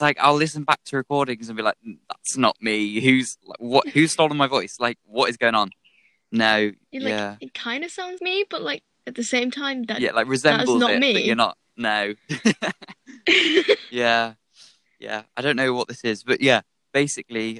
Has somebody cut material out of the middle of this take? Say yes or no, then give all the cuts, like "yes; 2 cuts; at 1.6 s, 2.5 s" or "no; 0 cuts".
yes; 1 cut; at 8.2 s